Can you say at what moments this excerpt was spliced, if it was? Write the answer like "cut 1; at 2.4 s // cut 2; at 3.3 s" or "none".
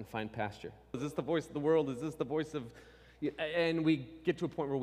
cut 1; at 0.9 s